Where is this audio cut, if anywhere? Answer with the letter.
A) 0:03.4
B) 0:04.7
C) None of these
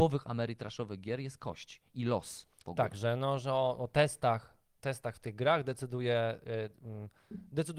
C